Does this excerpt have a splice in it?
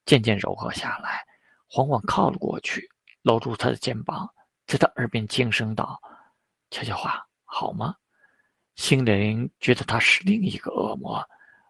no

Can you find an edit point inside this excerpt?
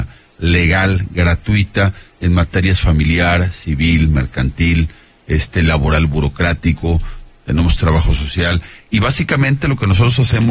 yes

